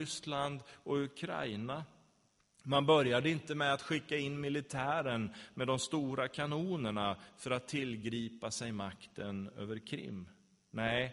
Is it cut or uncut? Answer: uncut